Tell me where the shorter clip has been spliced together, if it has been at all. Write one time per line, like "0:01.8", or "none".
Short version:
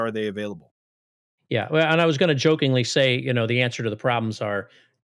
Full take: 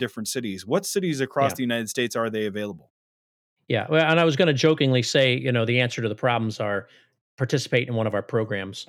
none